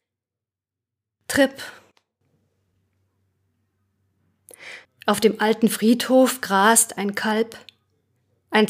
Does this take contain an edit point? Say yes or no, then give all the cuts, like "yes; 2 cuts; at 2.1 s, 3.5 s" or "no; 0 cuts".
yes; 1 cut; at 4.9 s